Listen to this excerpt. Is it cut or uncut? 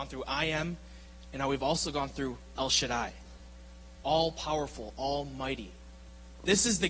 uncut